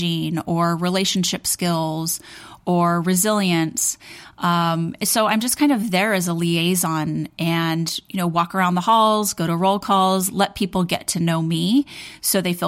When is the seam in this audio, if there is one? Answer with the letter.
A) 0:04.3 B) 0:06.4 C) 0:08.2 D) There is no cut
D